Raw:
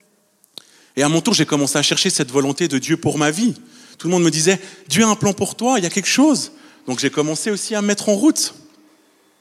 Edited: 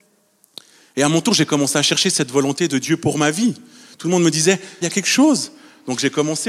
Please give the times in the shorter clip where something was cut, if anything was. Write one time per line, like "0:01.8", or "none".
0:04.8

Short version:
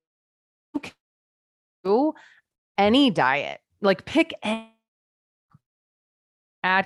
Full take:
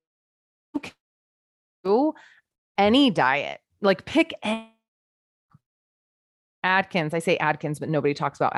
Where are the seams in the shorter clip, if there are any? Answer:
none

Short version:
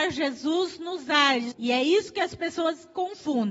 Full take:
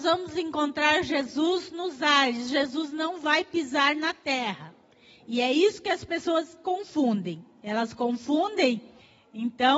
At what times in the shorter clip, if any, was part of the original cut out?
0:01.5

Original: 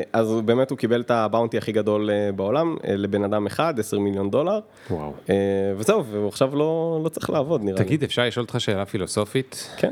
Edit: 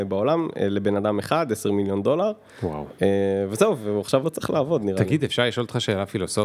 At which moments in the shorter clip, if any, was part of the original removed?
0:04.2

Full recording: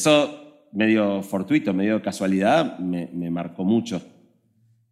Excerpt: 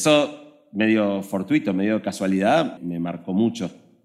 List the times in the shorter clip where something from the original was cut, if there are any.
0:02.8

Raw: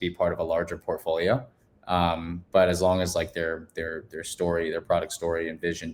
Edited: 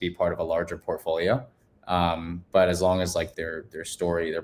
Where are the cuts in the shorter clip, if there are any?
0:03.3

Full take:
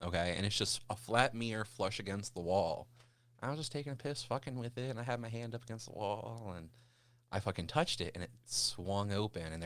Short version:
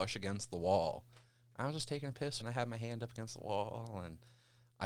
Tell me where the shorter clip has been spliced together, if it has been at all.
0:02.4

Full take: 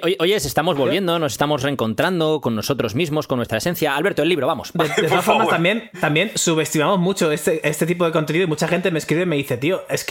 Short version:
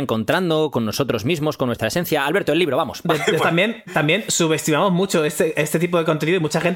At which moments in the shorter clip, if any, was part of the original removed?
0:03.4

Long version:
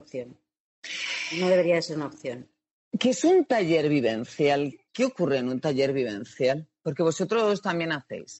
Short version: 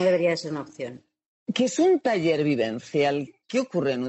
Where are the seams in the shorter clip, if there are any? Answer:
none

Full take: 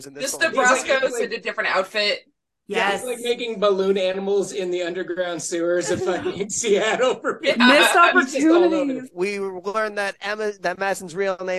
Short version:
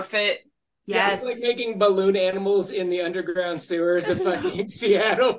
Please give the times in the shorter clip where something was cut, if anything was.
none

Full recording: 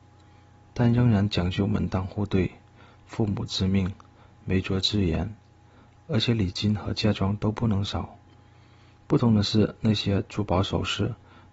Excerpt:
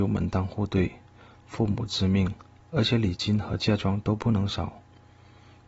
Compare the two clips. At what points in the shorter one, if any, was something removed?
0:02.5

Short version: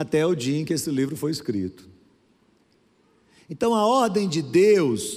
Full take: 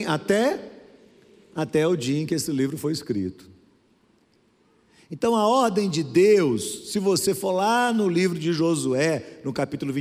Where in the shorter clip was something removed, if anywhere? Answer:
none

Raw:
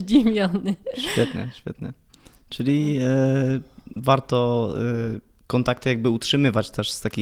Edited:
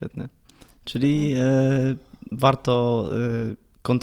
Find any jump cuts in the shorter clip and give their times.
none

